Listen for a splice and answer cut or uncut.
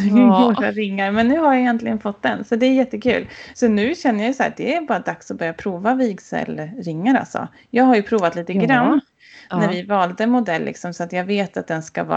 uncut